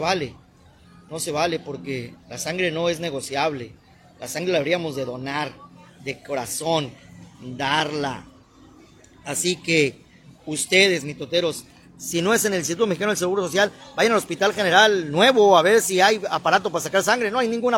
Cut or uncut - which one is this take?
uncut